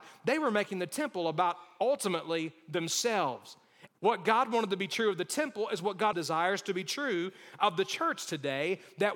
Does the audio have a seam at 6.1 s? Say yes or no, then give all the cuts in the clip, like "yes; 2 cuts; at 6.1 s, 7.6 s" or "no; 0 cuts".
yes; 2 cuts; at 3.9 s, 6.1 s